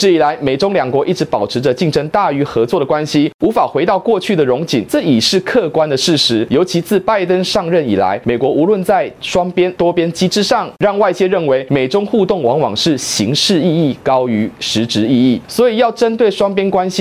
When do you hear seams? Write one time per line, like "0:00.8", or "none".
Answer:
0:10.7